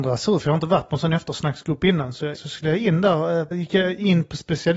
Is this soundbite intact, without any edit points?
no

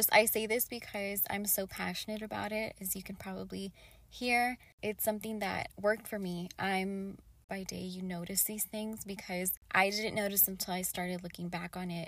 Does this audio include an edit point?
no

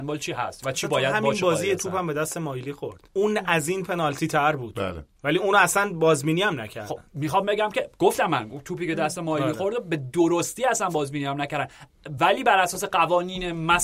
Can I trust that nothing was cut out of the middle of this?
no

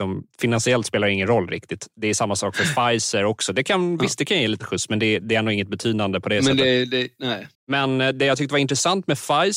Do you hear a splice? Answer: yes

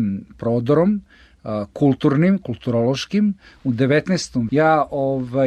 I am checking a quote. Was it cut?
yes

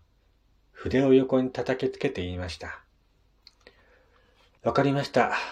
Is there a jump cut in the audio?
yes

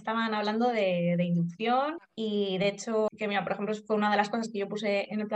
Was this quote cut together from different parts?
yes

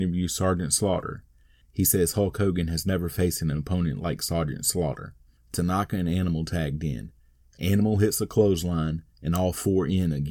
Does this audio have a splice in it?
yes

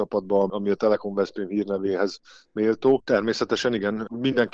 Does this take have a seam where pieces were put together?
yes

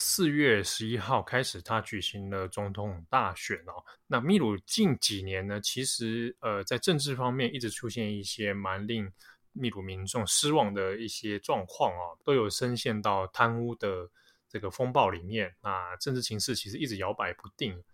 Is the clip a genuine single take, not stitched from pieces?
no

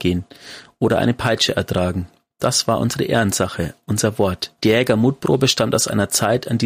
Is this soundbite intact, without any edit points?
no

